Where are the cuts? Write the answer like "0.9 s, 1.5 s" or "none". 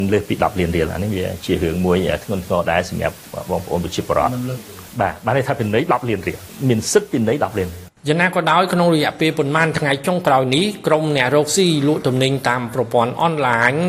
8.0 s

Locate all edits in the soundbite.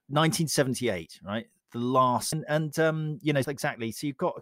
2.3 s, 3.4 s

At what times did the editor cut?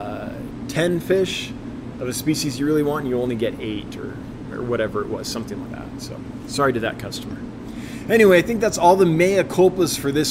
5.7 s

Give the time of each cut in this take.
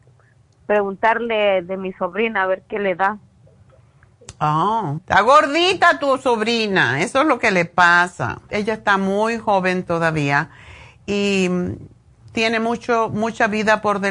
5.0 s, 8.5 s

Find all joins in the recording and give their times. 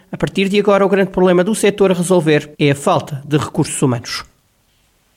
2.5 s

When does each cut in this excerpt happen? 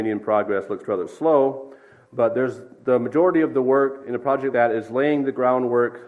4.5 s

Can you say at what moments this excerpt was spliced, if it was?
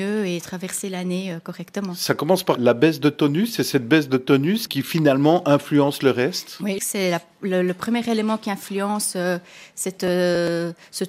2.6 s, 4.7 s, 6.8 s

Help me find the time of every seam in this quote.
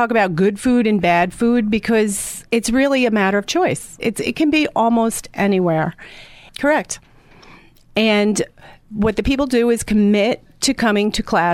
2.5 s, 4.0 s, 6.5 s

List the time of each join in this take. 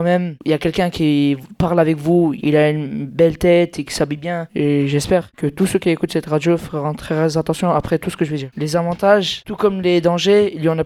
2.4 s, 4.5 s

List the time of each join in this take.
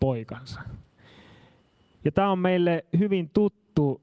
1.9 s

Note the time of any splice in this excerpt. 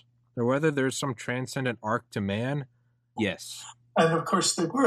3.2 s

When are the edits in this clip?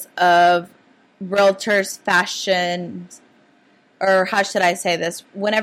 none

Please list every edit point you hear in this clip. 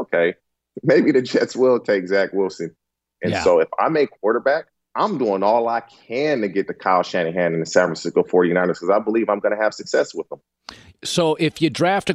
3.2 s, 4.9 s, 10.9 s

